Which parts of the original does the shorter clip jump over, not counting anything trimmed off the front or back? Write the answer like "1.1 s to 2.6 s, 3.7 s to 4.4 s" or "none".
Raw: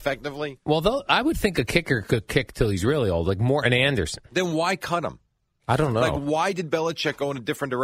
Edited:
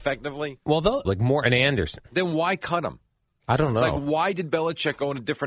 1.0 s to 3.2 s